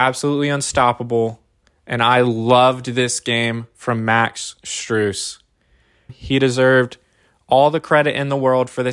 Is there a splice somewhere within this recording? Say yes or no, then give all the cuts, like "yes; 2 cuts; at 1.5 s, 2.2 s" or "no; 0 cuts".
yes; 1 cut; at 6.1 s